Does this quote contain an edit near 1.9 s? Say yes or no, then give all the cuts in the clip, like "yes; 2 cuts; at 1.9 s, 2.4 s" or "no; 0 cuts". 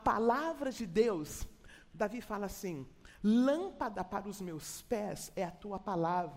yes; 1 cut; at 1.9 s